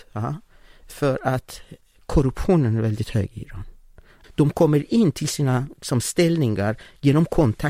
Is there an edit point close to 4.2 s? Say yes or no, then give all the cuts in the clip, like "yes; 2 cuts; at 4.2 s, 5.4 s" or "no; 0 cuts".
yes; 1 cut; at 4.2 s